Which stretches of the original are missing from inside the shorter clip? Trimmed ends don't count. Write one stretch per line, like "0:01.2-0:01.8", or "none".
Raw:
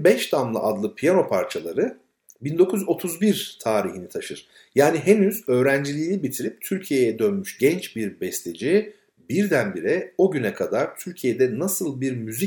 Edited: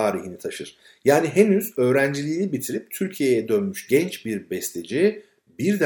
none